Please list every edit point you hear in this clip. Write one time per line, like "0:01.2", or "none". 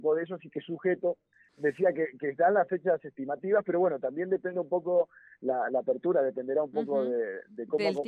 0:01.5